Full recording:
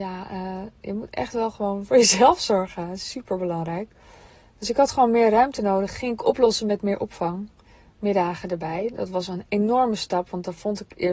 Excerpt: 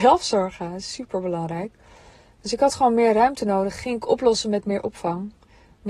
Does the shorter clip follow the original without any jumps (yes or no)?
yes